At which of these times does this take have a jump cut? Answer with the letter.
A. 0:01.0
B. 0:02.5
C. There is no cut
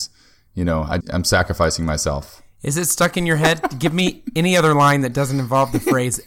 A